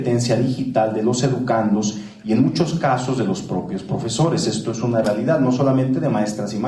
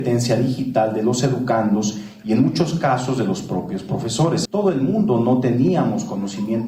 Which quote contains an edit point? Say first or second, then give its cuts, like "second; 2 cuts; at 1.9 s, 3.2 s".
second; 1 cut; at 4.5 s